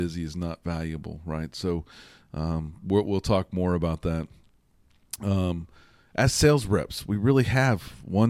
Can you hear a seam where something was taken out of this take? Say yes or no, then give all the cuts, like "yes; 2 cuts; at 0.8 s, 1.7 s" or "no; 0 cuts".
no; 0 cuts